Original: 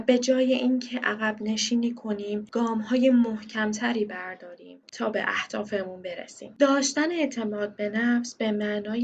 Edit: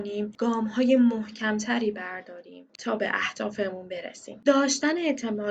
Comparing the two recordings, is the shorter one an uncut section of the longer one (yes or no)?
yes